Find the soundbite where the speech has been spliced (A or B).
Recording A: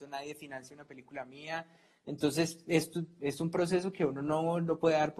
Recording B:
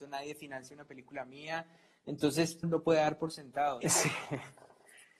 B